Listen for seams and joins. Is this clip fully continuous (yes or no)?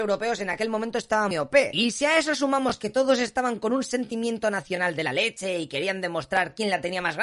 no